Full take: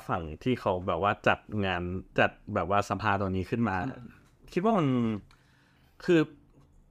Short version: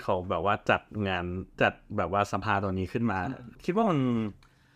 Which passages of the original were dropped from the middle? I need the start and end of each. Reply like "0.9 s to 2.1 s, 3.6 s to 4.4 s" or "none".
4.1 s to 4.4 s